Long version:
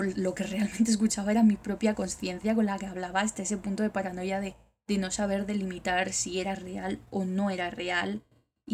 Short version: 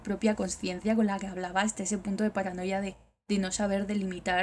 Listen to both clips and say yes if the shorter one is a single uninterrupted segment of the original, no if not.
yes